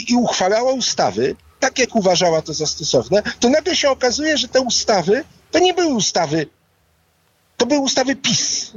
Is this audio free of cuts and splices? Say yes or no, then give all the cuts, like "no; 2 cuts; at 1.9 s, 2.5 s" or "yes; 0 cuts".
yes; 0 cuts